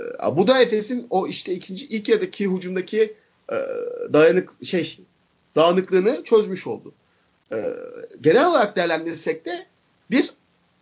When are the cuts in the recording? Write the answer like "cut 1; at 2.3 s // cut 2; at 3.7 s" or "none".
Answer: none